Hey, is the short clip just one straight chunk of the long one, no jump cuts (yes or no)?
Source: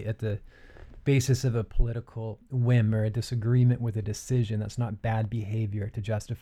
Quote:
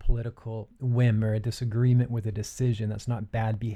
yes